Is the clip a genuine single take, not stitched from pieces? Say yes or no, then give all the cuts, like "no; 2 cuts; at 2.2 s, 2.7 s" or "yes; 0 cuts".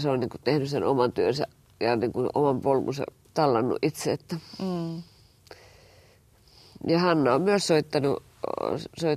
yes; 0 cuts